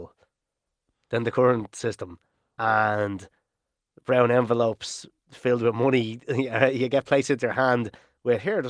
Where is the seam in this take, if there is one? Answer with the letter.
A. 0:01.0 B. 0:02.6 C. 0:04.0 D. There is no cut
B